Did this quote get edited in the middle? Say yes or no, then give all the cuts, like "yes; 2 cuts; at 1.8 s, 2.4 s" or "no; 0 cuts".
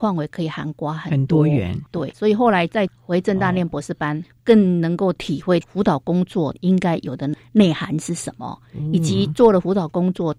yes; 1 cut; at 2.1 s